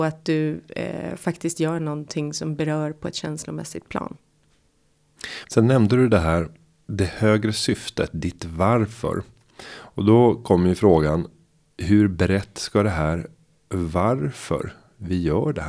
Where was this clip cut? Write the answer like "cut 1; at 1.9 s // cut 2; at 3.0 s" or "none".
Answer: cut 1; at 5.4 s